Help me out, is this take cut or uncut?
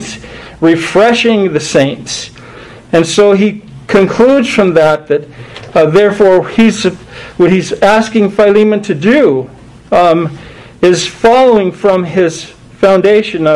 uncut